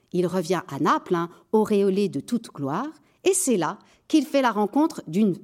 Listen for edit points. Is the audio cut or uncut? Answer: uncut